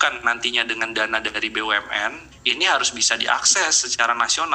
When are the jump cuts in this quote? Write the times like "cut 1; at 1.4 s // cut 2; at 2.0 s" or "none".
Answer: cut 1; at 2.3 s